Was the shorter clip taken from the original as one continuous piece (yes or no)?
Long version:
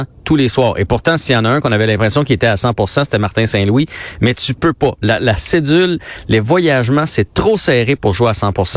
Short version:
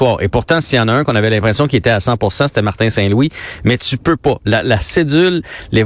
yes